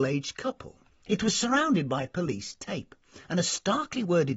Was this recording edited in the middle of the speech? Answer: yes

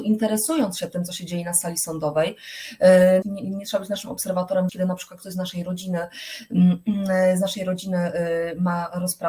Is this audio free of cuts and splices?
no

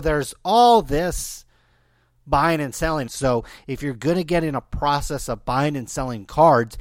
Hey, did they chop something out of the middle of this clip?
yes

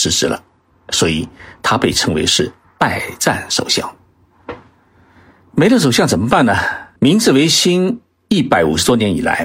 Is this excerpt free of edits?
no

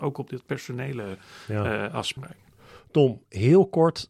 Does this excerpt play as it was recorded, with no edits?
yes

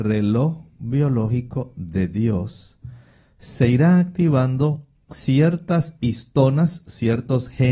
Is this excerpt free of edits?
yes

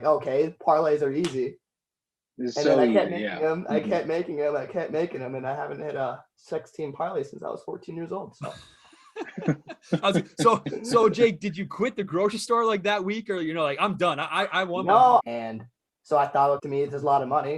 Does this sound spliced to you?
yes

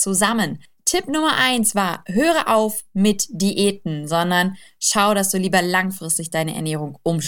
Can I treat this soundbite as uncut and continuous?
yes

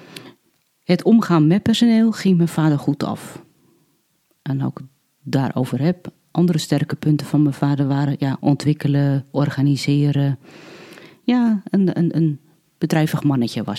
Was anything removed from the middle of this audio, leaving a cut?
no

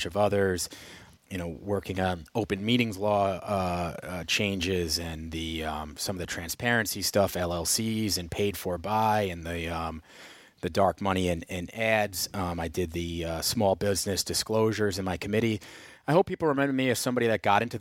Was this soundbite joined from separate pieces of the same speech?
no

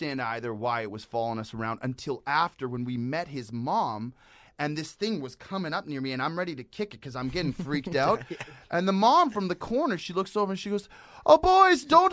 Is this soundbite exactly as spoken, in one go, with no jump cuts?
yes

